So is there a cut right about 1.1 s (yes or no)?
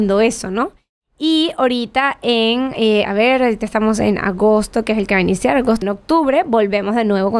no